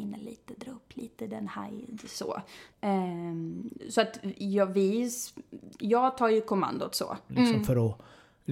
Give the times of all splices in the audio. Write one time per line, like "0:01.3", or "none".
0:02.7
0:07.3